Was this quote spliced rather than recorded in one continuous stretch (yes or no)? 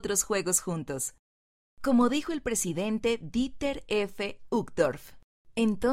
no